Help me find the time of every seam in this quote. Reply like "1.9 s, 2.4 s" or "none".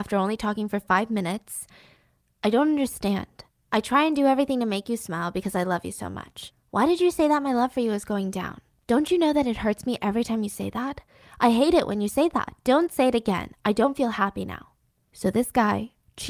none